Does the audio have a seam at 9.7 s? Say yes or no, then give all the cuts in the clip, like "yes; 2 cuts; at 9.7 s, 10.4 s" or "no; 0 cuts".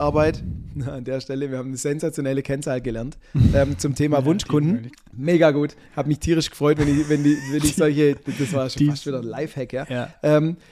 no; 1 cut; at 4.9 s